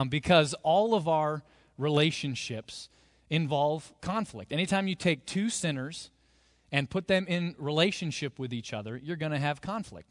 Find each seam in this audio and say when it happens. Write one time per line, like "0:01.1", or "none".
none